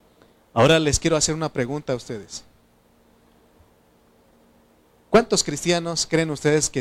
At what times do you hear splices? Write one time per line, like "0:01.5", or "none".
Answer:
none